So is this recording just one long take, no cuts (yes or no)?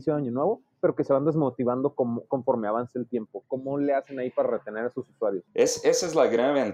yes